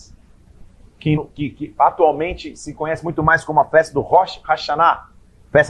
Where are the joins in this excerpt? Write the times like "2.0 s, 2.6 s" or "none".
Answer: 1.1 s